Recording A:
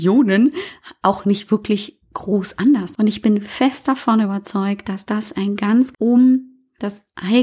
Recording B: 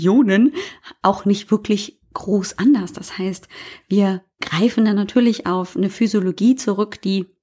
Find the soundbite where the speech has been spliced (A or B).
A